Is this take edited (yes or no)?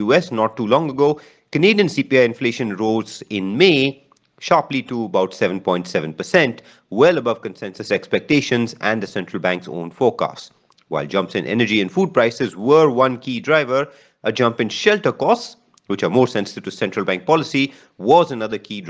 no